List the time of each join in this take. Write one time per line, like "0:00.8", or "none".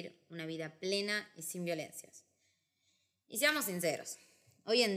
none